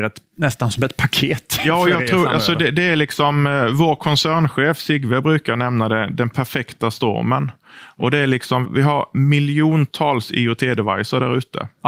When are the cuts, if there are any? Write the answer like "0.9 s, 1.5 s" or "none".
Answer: 8.6 s